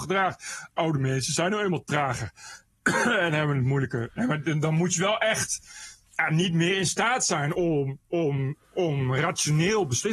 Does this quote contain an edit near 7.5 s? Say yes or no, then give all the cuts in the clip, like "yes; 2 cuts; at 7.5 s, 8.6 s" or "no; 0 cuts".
no; 0 cuts